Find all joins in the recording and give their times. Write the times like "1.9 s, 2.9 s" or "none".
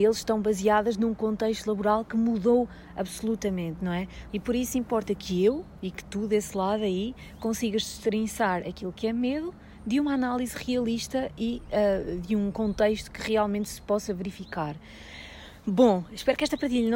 4.3 s